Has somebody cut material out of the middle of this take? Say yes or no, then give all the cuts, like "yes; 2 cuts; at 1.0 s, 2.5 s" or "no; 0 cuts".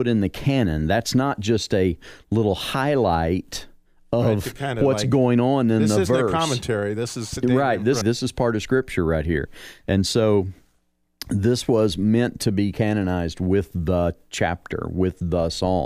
yes; 1 cut; at 8.0 s